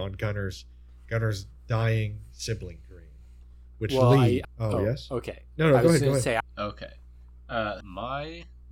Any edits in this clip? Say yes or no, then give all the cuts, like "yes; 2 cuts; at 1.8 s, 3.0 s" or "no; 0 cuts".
yes; 3 cuts; at 4.4 s, 6.4 s, 7.8 s